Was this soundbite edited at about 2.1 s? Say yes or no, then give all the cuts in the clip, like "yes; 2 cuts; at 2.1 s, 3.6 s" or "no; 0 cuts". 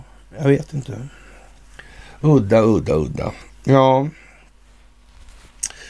no; 1 cut; at 3.5 s